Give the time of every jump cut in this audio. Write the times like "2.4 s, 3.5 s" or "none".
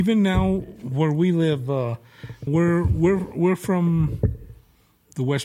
2.5 s